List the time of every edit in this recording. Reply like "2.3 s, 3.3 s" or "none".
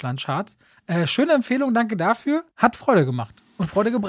2.5 s